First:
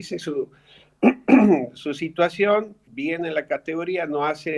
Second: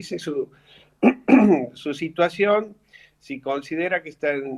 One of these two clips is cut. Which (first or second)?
first